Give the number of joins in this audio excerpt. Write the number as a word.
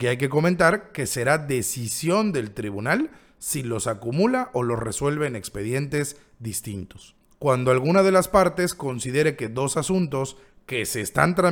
one